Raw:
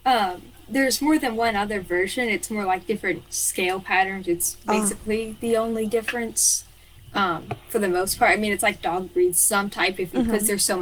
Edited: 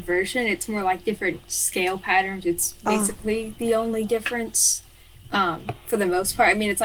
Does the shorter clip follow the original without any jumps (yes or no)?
yes